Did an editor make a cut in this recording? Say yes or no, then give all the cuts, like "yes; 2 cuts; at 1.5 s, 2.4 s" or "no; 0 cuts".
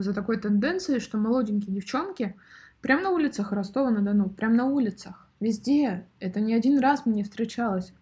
no; 0 cuts